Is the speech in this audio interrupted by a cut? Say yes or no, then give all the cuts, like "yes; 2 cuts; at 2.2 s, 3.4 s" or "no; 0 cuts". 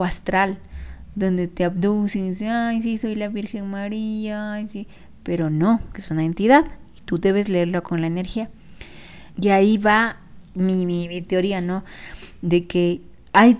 yes; 2 cuts; at 4.7 s, 9.3 s